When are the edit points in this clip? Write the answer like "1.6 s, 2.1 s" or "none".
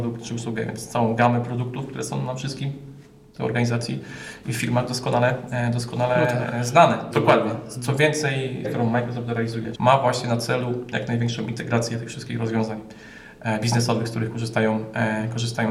7.1 s, 8.6 s, 9.7 s